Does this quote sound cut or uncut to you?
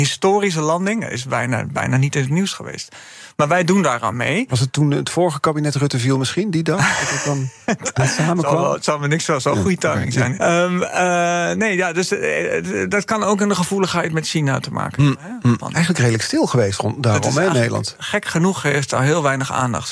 cut